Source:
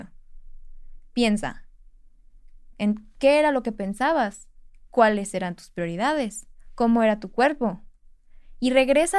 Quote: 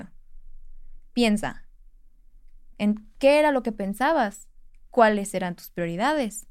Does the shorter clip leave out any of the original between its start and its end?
no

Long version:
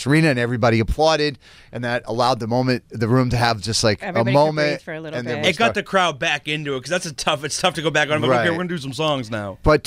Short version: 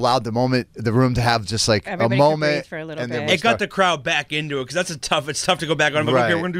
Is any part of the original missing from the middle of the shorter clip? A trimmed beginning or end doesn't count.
no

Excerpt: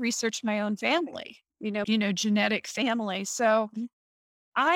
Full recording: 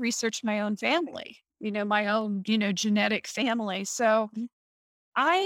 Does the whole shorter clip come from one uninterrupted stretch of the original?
no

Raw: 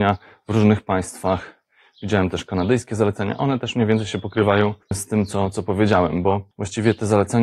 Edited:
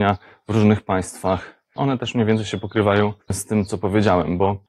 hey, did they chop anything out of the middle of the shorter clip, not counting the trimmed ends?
yes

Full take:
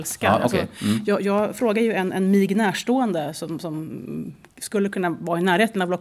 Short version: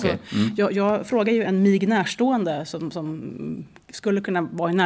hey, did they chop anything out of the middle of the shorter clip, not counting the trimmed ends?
yes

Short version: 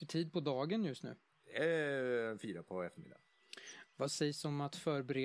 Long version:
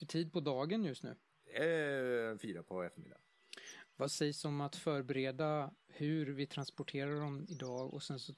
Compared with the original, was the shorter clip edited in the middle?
no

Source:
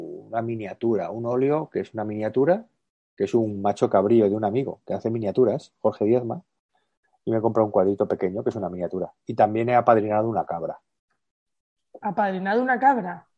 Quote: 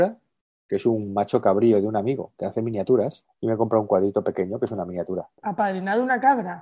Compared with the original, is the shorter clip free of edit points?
no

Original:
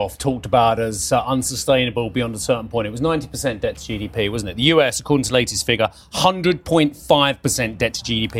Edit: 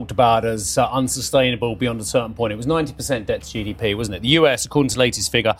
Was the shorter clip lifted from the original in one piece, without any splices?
yes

